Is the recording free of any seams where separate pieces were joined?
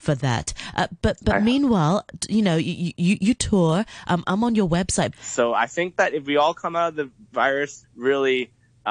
no; 2 cuts; at 5.1 s, 7.8 s

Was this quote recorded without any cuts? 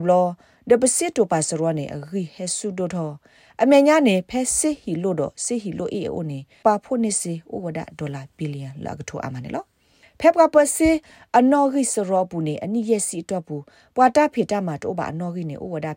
no; 1 cut; at 6.6 s

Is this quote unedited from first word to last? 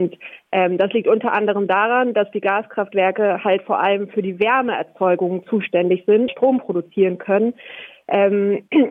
no; 1 cut; at 6.3 s

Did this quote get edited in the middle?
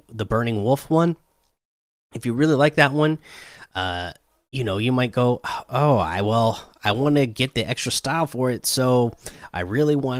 no; 0 cuts

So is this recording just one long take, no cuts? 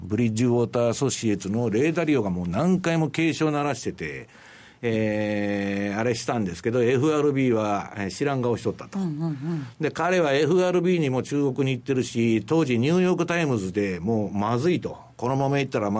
yes; 0 cuts

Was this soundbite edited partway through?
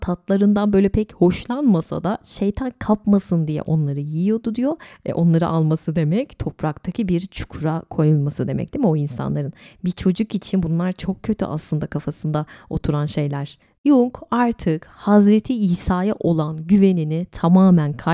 yes; 1 cut; at 4.9 s

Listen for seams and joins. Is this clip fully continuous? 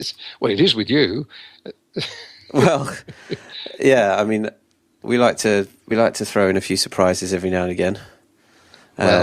yes; 0 cuts

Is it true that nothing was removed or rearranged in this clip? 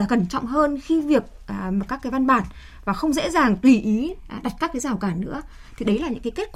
no; 1 cut; at 1.9 s

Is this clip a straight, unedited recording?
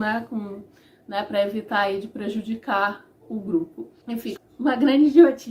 no; 1 cut; at 4.4 s

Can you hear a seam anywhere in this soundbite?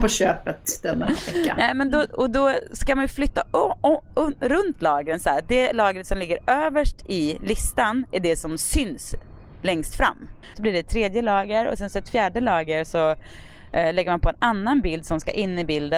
yes; 1 cut; at 10.5 s

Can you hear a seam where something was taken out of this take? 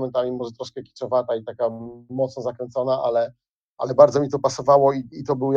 no; 0 cuts

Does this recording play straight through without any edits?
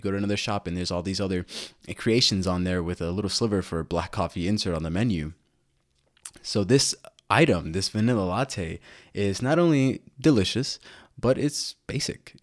yes; 0 cuts

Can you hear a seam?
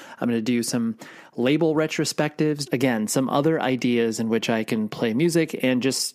yes; 1 cut; at 2.7 s

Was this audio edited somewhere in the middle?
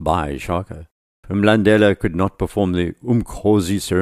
yes; 1 cut; at 1.2 s

